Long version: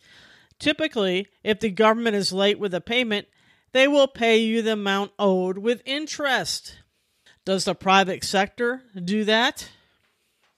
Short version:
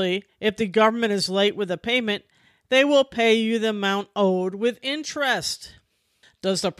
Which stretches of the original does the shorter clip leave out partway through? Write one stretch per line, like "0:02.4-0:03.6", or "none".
none